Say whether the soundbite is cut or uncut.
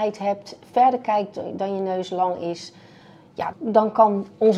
cut